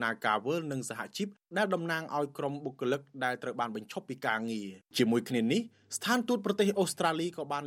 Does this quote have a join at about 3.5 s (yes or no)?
no